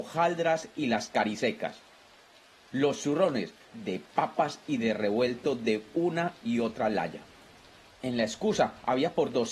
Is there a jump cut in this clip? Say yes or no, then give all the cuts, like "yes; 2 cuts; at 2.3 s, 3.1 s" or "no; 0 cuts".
yes; 2 cuts; at 3.7 s, 7.9 s